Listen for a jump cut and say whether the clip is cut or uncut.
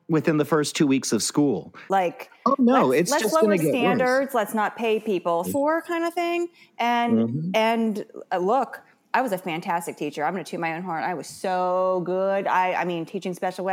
cut